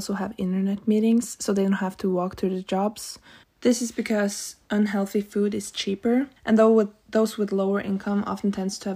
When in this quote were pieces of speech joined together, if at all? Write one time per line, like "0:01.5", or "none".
0:03.4
0:06.4